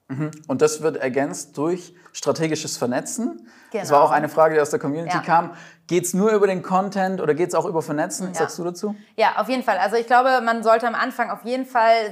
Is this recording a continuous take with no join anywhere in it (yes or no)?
no